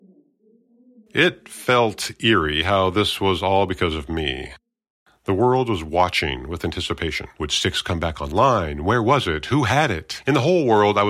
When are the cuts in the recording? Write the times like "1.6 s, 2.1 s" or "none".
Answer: none